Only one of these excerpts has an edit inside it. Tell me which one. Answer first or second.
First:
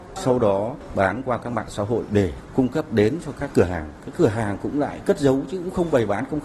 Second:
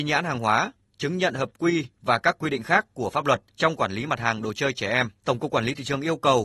second